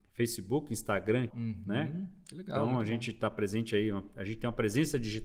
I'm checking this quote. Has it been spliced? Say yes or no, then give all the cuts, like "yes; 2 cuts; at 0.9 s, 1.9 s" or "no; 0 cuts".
yes; 1 cut; at 1.3 s